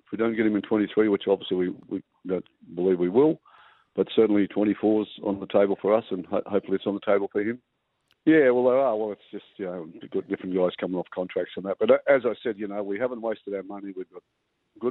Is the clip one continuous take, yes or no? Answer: no